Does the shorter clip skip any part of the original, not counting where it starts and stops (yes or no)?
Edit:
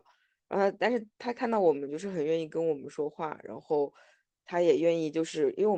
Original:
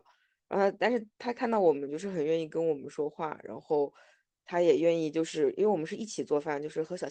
no